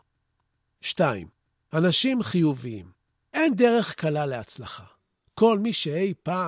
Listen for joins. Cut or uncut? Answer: uncut